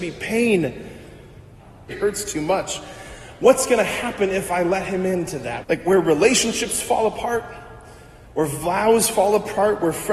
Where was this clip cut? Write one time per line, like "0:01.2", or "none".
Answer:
0:01.9
0:05.6